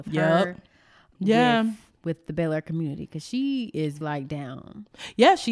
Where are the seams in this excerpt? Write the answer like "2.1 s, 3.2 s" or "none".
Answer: 1.1 s, 4.0 s